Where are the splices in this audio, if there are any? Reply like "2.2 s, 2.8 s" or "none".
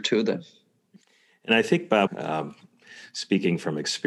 2.1 s